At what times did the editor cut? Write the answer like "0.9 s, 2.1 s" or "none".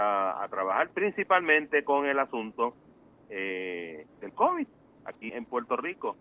4.1 s, 5.3 s